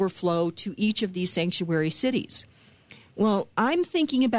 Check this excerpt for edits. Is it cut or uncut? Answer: uncut